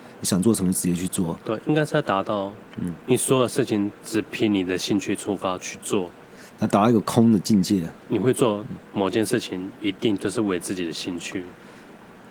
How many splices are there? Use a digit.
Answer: 1